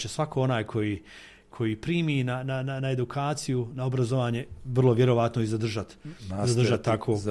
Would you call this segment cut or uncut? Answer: uncut